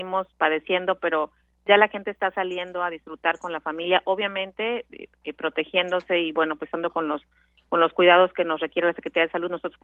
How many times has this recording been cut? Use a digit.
0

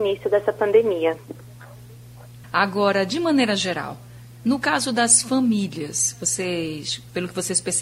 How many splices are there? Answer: 1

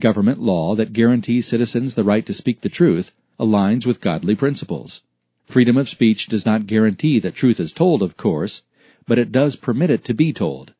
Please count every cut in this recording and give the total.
1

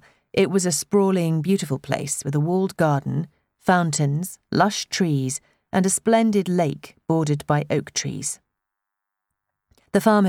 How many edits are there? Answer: 0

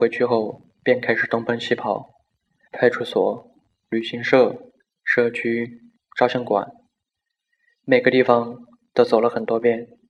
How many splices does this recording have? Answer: 2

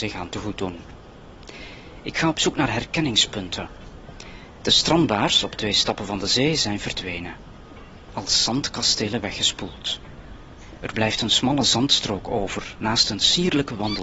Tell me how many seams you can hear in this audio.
1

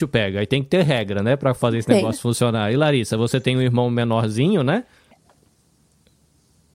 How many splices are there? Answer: 1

